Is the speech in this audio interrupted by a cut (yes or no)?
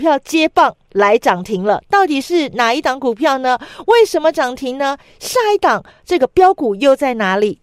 no